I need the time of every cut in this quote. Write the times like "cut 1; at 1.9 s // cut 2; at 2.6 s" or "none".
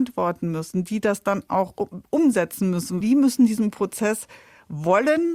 cut 1; at 3.0 s